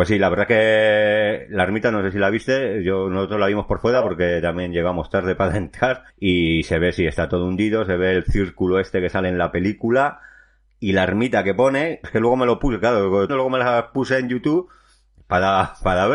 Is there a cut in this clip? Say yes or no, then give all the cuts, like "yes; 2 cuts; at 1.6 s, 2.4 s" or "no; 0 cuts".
yes; 3 cuts; at 6.1 s, 12.0 s, 13.3 s